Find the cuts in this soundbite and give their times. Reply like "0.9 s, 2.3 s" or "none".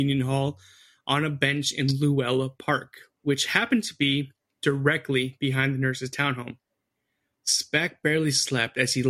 7.3 s